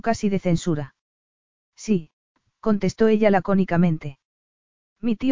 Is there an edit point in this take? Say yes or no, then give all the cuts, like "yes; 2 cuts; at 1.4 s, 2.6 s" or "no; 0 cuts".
no; 0 cuts